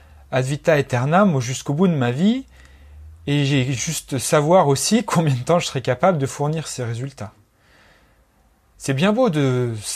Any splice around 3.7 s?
no; 1 cut; at 8.7 s

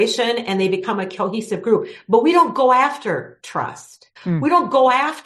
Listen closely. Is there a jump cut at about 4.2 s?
yes; 1 cut; at 4.2 s

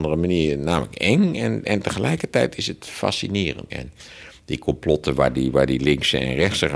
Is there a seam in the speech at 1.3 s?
no; 1 cut; at 3.7 s

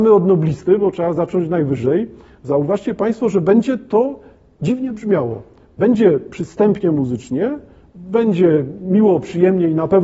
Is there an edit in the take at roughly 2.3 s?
no; 0 cuts

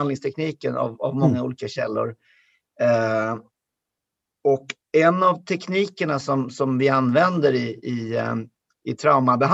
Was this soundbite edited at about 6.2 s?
no; 0 cuts

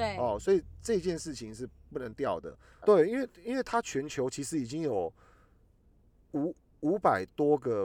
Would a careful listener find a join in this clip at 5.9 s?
no; 1 cut; at 2.8 s

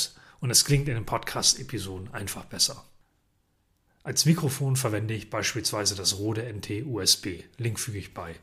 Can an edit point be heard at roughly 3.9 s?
yes; 1 cut; at 3.9 s

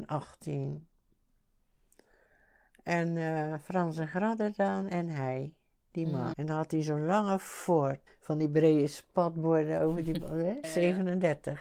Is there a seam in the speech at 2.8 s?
no; 3 cuts; at 6.3 s, 8.1 s, 10.6 s

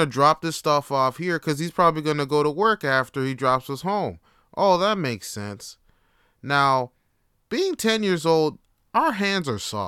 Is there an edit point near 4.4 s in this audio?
no; 0 cuts

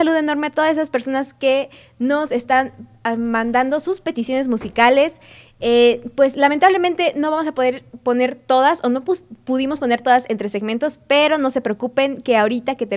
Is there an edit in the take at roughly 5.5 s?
no; 0 cuts

